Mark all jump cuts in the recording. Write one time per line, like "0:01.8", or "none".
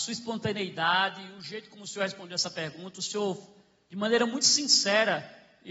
none